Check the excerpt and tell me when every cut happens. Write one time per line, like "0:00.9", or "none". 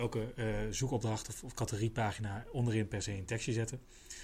none